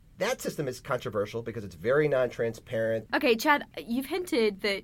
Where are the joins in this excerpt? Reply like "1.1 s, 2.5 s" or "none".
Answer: 3.1 s

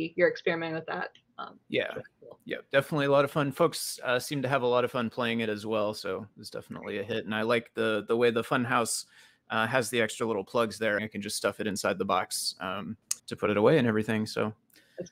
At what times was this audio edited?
11.0 s, 13.2 s

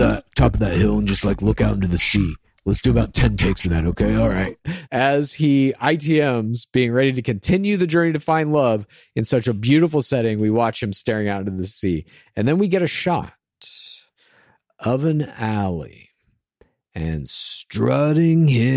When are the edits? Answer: 4.9 s

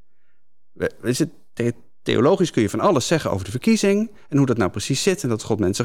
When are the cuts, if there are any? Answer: none

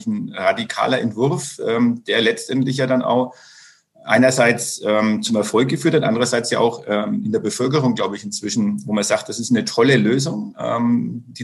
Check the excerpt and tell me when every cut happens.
none

